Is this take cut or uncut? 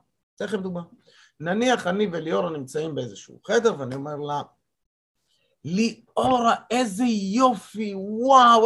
uncut